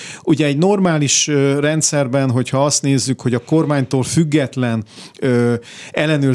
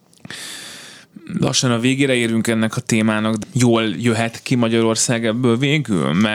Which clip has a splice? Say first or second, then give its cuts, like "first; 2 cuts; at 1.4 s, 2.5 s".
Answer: second; 1 cut; at 3.4 s